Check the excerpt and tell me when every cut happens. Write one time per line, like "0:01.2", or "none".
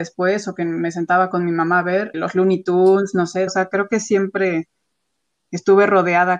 0:02.1
0:03.5